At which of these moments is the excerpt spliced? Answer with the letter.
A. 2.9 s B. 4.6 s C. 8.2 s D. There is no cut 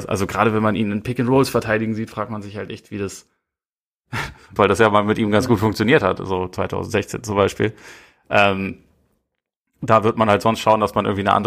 B